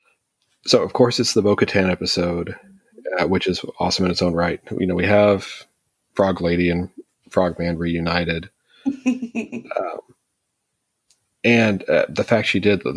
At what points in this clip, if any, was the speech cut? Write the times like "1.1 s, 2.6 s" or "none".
none